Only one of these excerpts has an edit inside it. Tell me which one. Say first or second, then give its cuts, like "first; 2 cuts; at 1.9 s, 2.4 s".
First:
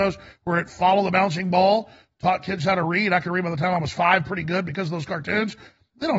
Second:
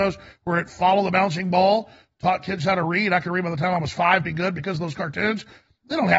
second; 1 cut; at 4.2 s